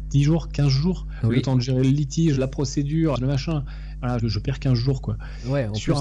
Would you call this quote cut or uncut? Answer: cut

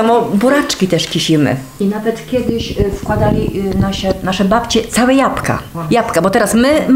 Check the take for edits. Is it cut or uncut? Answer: cut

